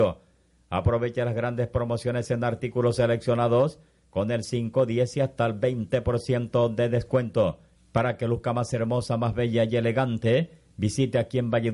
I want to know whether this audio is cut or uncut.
cut